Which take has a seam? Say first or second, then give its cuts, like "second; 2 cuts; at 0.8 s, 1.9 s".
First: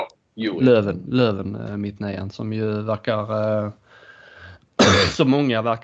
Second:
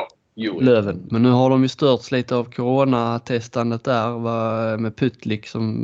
second; 1 cut; at 1.1 s